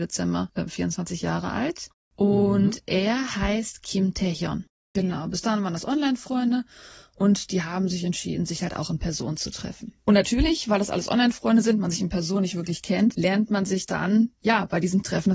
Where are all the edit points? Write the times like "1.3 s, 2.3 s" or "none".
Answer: 4.9 s

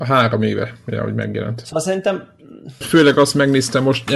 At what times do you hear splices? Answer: 2.8 s

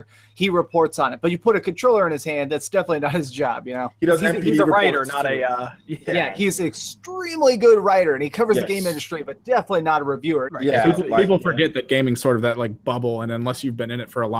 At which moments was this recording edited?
10.5 s

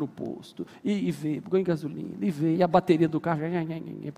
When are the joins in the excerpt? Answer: 1.4 s, 2.5 s

